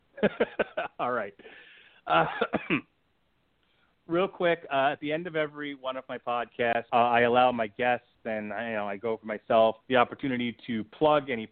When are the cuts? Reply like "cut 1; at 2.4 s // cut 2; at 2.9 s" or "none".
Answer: cut 1; at 6.9 s // cut 2; at 9.8 s